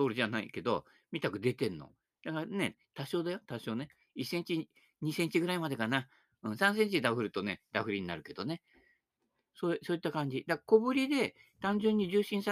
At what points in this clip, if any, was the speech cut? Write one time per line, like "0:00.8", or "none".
0:02.7